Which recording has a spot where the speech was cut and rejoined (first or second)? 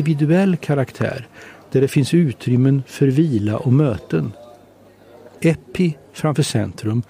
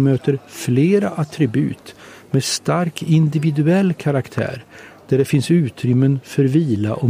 first